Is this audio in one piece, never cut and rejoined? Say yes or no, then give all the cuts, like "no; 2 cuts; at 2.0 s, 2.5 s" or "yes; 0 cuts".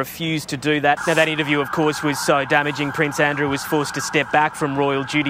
no; 1 cut; at 1.0 s